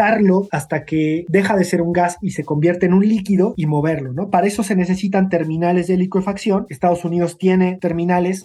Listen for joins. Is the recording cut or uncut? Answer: uncut